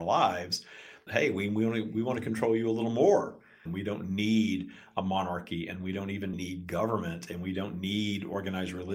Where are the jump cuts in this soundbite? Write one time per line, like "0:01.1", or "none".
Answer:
0:01.1
0:03.7
0:06.3